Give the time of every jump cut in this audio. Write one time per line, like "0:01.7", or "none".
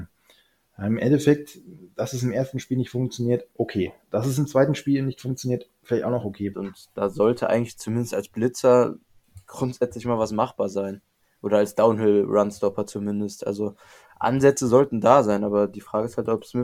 0:06.5